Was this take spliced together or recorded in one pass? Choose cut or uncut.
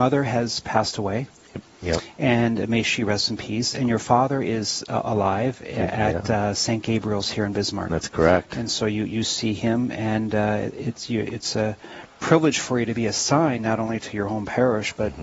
uncut